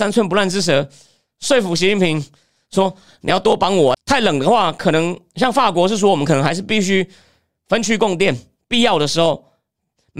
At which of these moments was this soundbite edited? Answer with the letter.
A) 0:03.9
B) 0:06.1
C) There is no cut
A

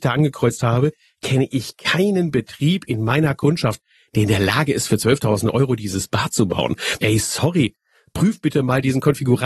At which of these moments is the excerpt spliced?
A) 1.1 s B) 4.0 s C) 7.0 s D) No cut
C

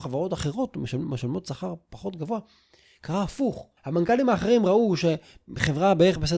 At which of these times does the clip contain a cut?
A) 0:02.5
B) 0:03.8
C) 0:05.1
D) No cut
B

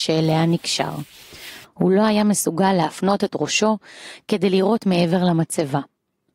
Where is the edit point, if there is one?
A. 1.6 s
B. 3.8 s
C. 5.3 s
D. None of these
A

